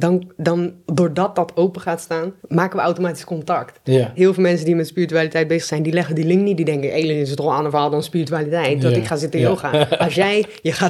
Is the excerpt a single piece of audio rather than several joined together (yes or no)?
no